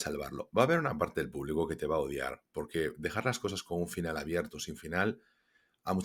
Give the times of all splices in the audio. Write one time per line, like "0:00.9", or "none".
none